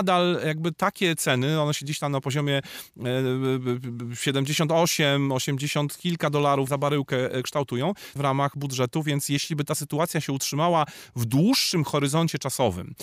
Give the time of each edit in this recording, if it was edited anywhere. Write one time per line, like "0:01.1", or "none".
0:06.7
0:08.2